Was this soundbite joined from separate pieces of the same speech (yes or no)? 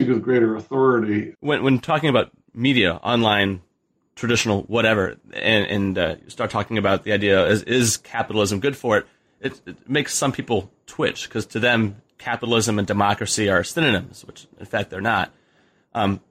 yes